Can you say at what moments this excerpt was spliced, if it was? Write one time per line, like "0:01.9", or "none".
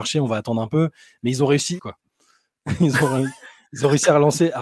0:01.8